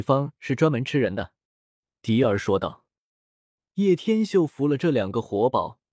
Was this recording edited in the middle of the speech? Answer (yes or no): yes